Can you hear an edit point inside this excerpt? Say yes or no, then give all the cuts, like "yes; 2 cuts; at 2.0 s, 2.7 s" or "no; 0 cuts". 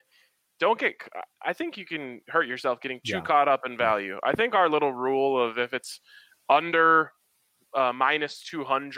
no; 0 cuts